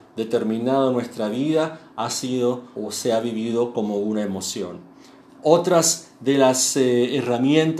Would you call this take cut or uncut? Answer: cut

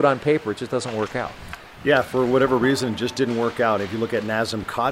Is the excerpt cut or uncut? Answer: uncut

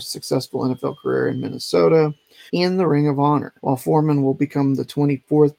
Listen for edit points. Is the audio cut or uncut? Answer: cut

